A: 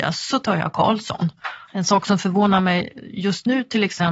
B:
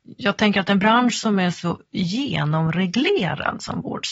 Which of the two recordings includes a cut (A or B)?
A